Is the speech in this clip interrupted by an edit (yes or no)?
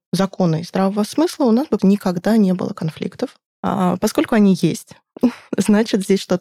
yes